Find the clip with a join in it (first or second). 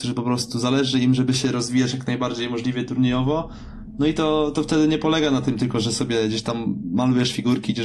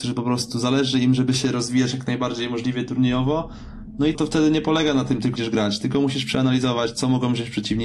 second